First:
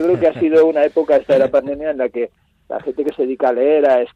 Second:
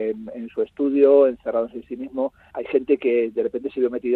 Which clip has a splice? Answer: second; 1 cut; at 2.5 s

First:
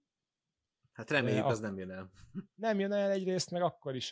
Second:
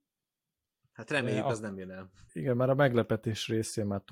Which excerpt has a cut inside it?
second; 1 cut; at 2.3 s

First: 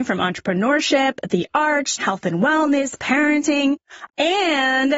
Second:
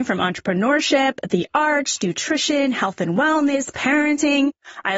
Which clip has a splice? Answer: first; 2 cuts; at 2.0 s, 4.1 s

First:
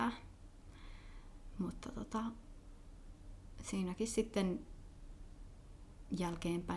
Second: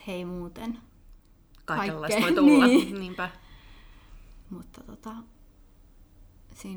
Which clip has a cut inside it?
second; 1 cut; at 4.4 s

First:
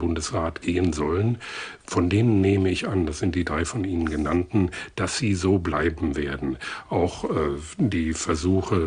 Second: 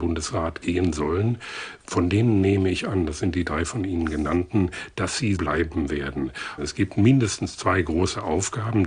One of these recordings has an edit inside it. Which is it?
second; 2 cuts; at 5.4 s, 6.6 s

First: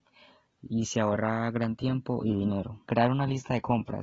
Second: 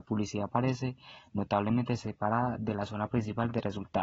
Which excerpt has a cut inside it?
first; 1 cut; at 2.8 s

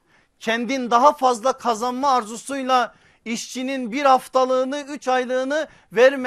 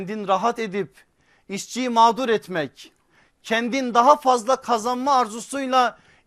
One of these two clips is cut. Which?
first; 1 cut; at 4.8 s

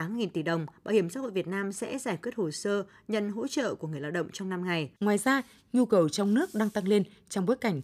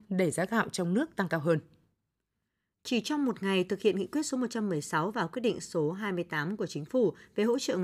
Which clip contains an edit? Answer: first; 1 cut; at 5.0 s

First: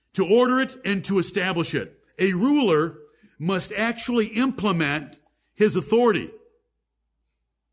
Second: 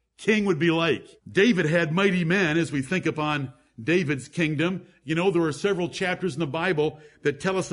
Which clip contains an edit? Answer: second; 1 cut; at 1.2 s

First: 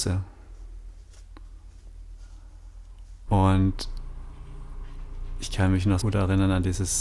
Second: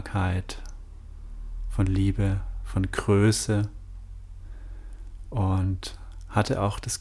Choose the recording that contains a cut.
first; 2 cuts; at 3.3 s, 6.0 s

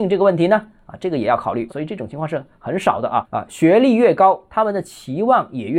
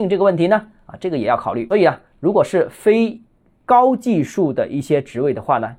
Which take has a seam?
first; 2 cuts; at 1.7 s, 3.3 s

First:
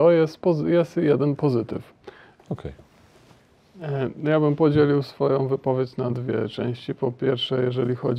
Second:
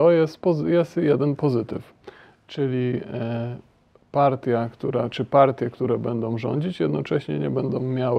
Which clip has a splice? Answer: first; 1 cut; at 2.4 s

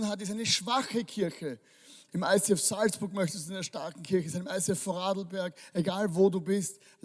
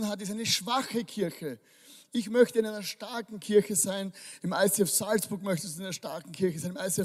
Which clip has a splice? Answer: first; 1 cut; at 2.1 s

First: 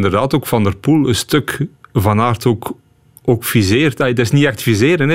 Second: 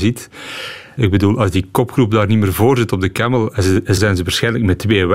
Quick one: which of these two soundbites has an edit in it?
second; 2 cuts; at 1.0 s, 4.0 s

